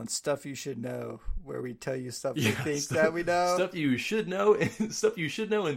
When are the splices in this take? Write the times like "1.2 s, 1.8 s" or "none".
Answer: none